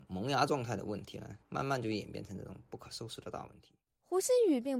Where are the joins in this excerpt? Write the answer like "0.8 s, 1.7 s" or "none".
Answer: none